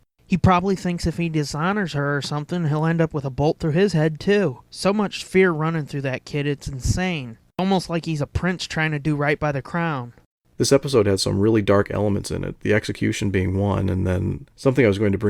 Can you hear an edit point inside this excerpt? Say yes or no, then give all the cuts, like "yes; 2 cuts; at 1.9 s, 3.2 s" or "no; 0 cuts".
no; 0 cuts